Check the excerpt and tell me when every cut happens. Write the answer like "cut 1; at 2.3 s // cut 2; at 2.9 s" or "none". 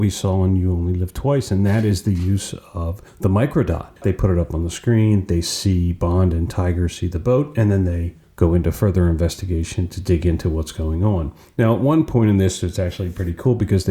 cut 1; at 4.0 s